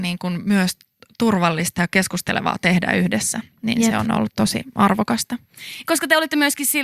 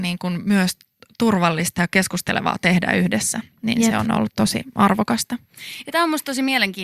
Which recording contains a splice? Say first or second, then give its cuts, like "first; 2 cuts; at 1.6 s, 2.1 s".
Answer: first; 1 cut; at 5.8 s